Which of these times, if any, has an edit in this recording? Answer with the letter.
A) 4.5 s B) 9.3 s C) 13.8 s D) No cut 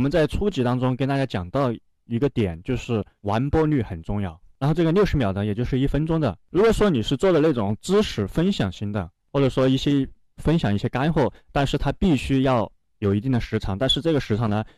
D